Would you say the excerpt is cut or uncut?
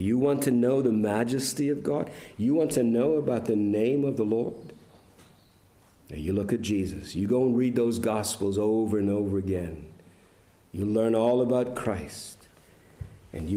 uncut